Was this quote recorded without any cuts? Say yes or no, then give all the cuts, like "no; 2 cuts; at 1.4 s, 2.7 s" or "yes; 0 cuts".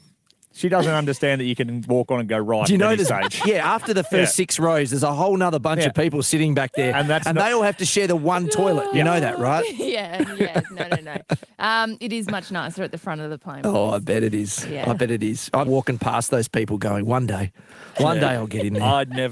no; 1 cut; at 15.7 s